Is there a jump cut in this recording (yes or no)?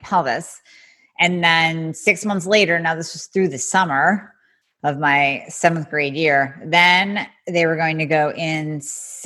no